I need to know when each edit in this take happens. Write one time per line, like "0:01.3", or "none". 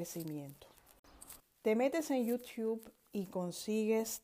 0:01.4